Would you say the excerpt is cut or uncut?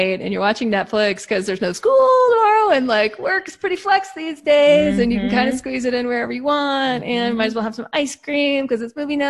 uncut